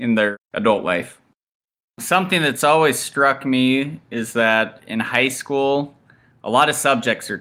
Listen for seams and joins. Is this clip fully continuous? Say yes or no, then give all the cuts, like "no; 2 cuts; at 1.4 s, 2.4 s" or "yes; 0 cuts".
yes; 0 cuts